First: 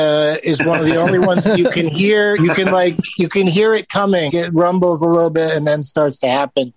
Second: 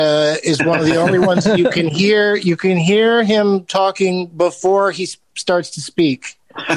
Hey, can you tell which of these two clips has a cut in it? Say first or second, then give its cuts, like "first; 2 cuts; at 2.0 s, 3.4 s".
first; 2 cuts; at 2.4 s, 4.3 s